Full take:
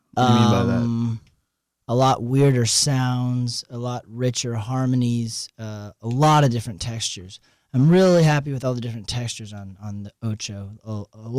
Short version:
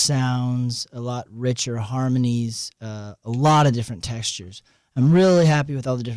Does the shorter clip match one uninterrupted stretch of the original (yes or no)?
yes